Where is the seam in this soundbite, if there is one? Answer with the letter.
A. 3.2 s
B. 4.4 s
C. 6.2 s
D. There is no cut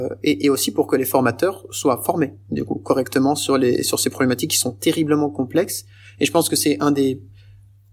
D